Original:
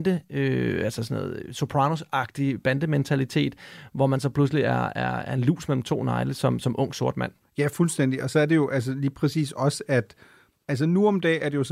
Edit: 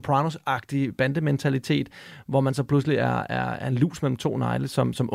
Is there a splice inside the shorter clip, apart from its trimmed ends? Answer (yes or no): no